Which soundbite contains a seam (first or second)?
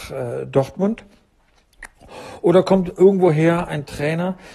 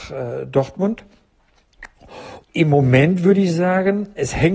second